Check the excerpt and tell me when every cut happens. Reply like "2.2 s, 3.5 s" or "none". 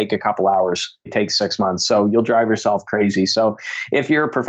1.1 s